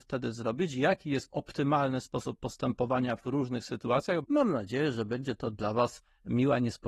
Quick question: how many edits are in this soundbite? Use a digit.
1